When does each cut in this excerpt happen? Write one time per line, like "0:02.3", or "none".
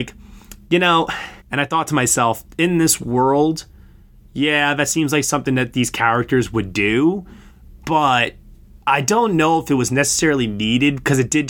0:01.4